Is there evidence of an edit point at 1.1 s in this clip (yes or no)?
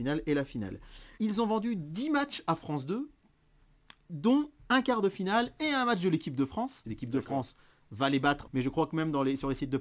yes